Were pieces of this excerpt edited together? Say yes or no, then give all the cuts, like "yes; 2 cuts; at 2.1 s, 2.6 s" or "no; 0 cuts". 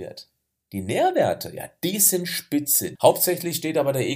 yes; 1 cut; at 3.0 s